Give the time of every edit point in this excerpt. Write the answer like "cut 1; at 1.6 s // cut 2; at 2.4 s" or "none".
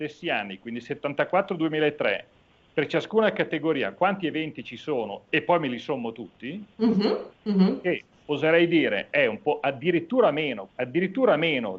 cut 1; at 7.3 s // cut 2; at 10.7 s

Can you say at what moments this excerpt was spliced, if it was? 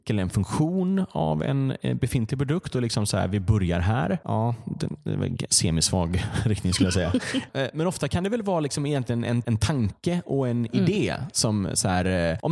none

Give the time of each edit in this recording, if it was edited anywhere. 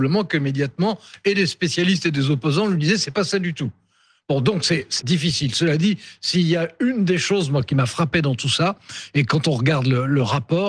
cut 1; at 5.0 s

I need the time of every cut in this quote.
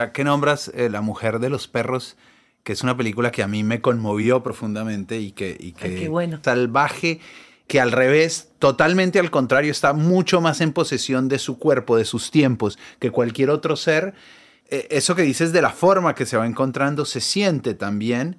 cut 1; at 6.4 s // cut 2; at 14.6 s

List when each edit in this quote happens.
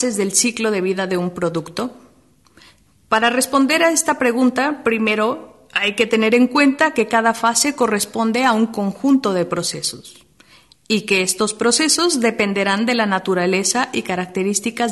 none

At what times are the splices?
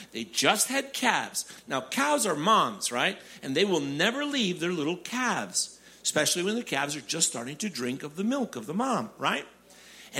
none

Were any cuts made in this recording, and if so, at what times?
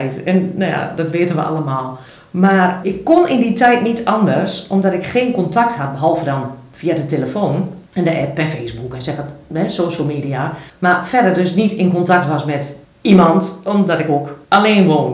cut 1; at 2.8 s

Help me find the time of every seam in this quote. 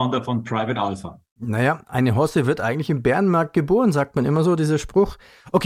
none

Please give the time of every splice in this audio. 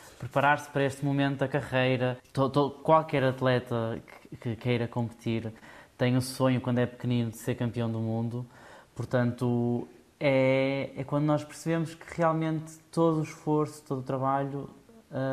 none

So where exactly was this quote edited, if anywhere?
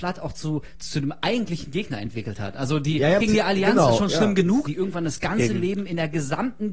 cut 1; at 3.2 s // cut 2; at 4.7 s

